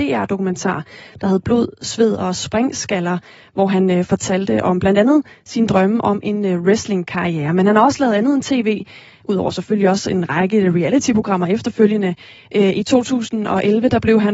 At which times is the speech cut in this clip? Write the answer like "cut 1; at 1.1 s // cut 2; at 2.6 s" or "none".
none